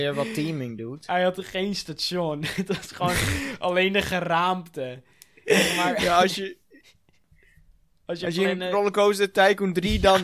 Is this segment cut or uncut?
uncut